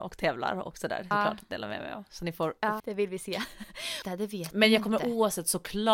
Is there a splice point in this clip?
yes; 3 cuts; at 1.1 s, 2.8 s, 4.0 s

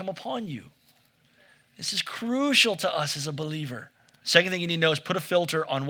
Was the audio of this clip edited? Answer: yes; 1 cut; at 4.2 s

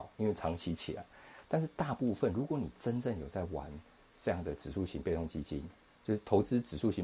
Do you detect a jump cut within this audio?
yes; 1 cut; at 1.4 s

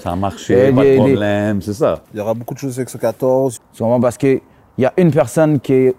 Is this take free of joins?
no; 2 cuts; at 2.0 s, 3.6 s

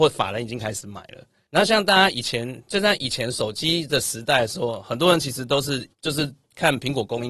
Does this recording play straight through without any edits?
no; 2 cuts; at 1.5 s, 5.9 s

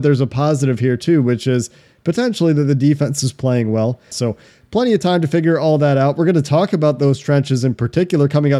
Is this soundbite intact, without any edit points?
no; 1 cut; at 4.1 s

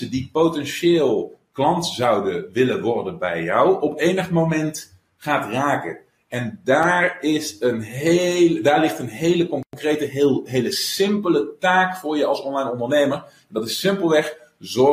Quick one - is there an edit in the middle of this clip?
no; 0 cuts

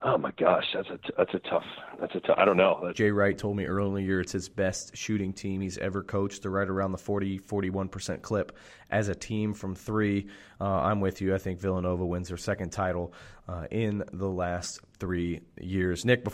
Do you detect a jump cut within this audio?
yes; 1 cut; at 2.9 s

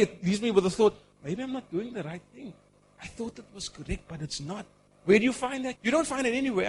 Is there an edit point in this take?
yes; 1 cut; at 5.7 s

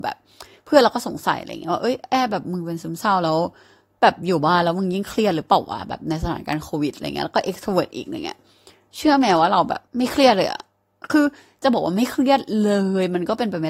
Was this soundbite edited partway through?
yes; 1 cut; at 9.9 s

